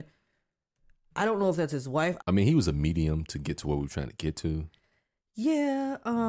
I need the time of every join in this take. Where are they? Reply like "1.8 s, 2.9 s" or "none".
2.2 s

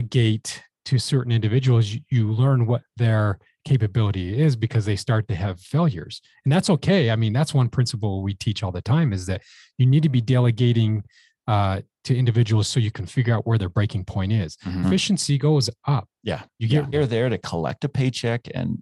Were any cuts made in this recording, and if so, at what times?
14.8 s, 16.9 s

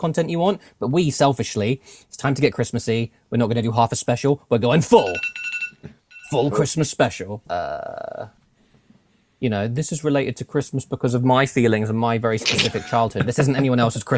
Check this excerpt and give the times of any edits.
7.4 s

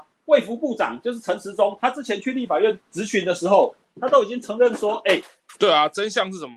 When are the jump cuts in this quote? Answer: 5.5 s

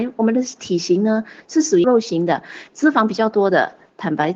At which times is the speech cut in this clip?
1.8 s

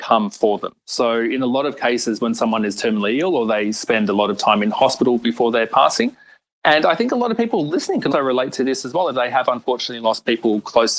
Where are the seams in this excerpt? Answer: 8.1 s

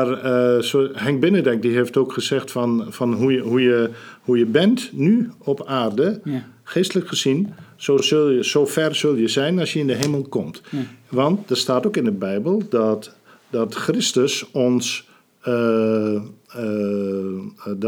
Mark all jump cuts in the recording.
none

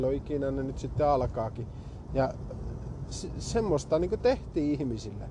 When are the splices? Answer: 2.1 s

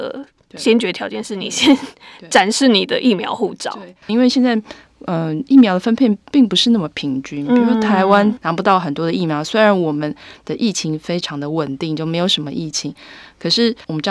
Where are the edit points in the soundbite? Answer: 4.1 s

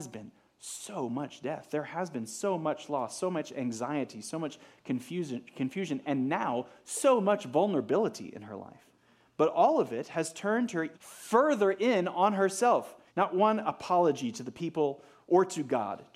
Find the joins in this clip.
10.9 s, 13.1 s

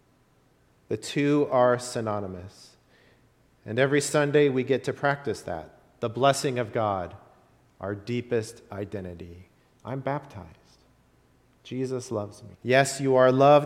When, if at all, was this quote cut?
12.5 s

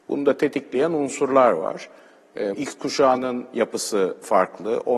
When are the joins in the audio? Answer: 2.5 s

